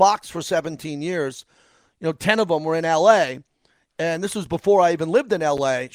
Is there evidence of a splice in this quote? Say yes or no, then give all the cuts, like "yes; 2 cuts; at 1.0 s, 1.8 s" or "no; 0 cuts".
no; 0 cuts